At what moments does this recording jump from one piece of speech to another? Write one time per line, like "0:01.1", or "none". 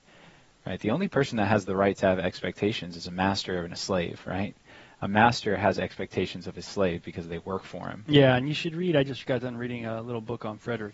none